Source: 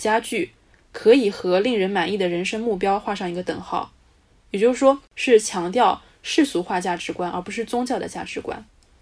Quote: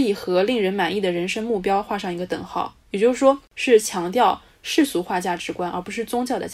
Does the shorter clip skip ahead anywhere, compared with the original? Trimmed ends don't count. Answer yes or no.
yes